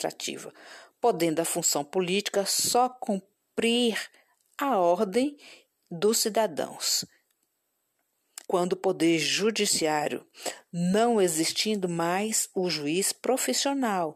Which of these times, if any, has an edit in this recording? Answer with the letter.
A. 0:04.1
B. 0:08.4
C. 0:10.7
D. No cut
B